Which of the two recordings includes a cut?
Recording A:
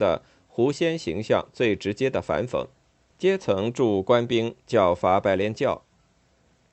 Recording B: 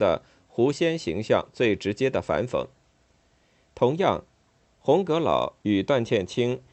A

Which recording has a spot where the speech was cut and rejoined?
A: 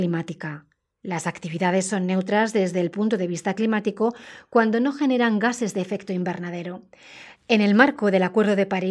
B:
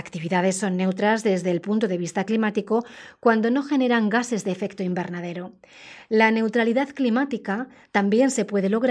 A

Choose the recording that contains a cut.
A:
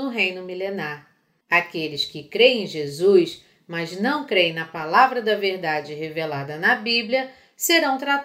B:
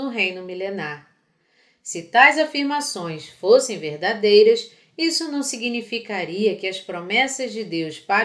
A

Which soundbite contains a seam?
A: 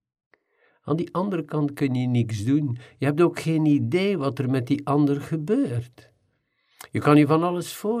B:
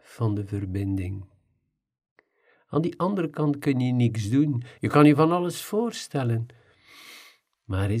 B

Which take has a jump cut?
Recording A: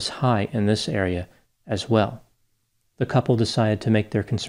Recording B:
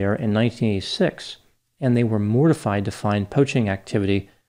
A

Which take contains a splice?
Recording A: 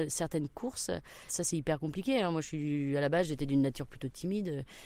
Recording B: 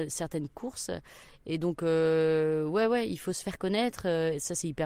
A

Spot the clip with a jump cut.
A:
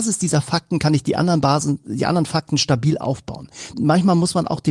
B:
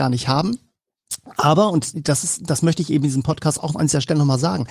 A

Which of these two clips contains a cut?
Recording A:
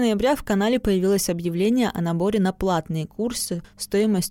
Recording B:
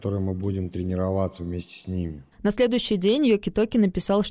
B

